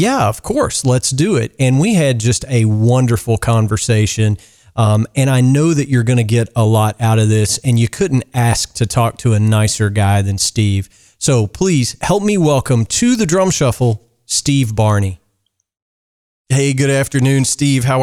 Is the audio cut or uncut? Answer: uncut